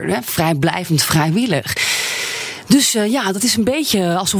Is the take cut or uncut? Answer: uncut